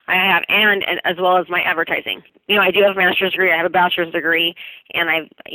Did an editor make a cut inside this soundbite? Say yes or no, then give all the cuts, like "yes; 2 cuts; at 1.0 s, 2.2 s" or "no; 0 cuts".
no; 0 cuts